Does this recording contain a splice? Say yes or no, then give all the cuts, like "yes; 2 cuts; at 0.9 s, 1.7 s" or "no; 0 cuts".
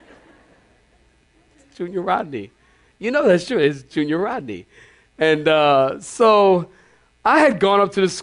no; 0 cuts